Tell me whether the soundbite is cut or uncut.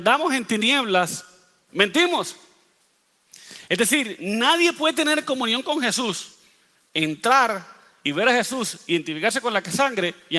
uncut